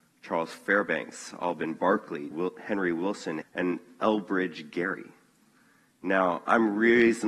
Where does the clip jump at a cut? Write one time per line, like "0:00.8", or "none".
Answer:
0:02.3
0:03.4